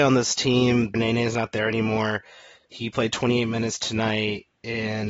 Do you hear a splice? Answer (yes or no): yes